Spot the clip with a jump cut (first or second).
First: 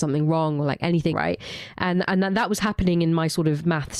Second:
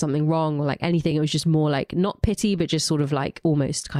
first